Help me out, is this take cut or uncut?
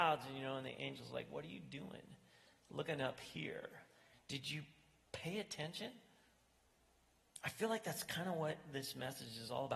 cut